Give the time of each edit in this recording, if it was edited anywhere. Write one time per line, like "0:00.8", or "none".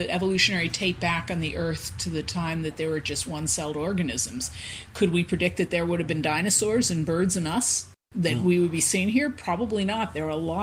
0:08.0